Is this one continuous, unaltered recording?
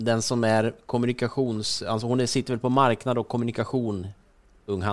yes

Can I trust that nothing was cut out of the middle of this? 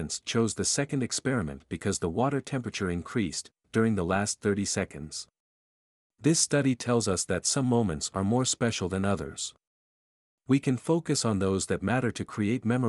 no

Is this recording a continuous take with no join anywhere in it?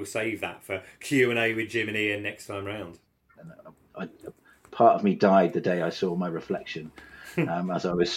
no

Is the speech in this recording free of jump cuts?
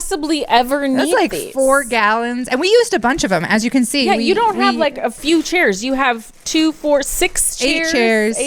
yes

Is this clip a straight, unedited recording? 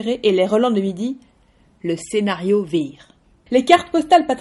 no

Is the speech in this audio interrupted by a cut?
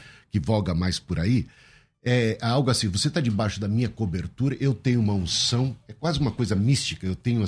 no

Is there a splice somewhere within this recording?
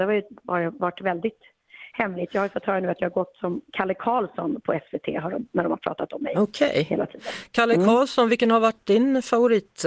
no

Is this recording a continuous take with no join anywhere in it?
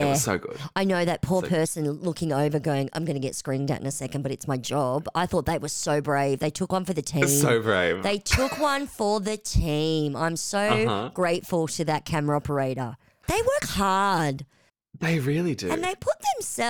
yes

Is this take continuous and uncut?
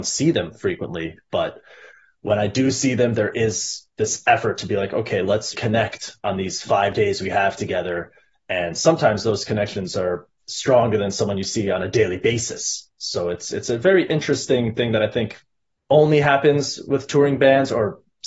no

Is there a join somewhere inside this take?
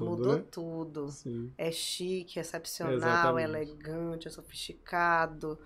no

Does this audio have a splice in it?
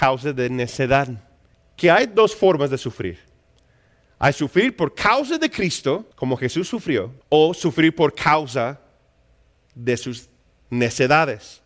yes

